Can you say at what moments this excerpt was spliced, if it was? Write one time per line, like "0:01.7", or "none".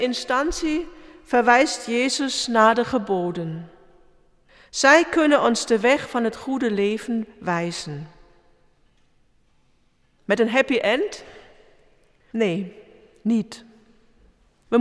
0:10.2